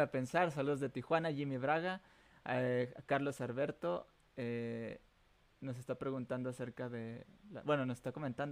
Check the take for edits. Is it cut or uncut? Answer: uncut